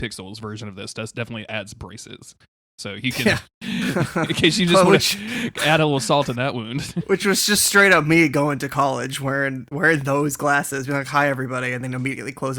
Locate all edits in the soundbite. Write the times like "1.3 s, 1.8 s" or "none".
none